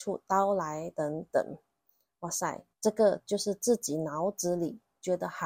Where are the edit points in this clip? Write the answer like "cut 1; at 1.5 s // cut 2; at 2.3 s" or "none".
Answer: cut 1; at 0.9 s // cut 2; at 2.7 s